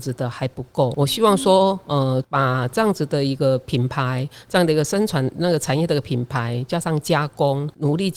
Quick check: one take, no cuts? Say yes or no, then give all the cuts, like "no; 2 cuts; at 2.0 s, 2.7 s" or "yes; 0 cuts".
yes; 0 cuts